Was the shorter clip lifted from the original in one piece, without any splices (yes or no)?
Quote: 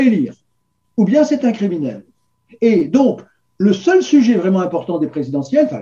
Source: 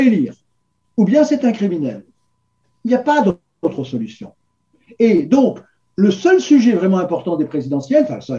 no